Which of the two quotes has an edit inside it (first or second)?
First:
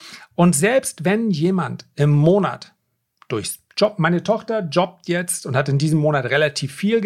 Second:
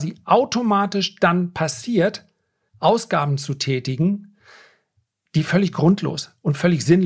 second